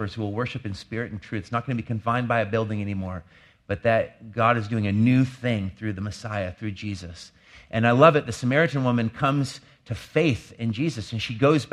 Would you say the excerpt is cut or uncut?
uncut